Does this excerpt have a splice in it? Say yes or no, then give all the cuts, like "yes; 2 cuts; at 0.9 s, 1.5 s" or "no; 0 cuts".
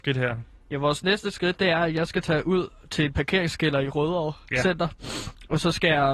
no; 0 cuts